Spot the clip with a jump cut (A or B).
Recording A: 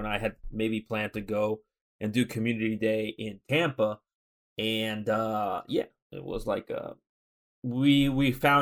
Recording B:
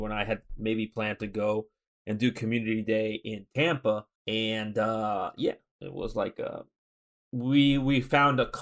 B